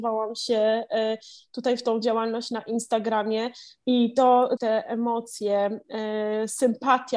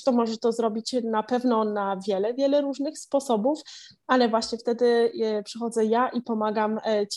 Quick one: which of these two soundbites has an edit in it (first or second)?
first